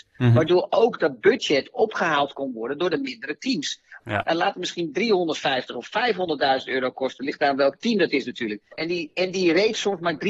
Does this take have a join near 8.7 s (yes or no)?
yes